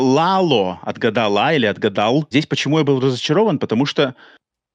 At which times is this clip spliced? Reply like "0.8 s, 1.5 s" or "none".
2.3 s